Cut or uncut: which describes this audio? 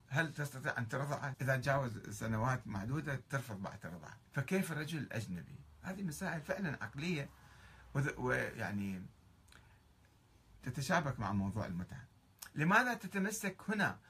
cut